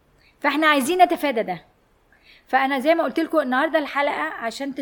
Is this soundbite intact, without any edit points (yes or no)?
yes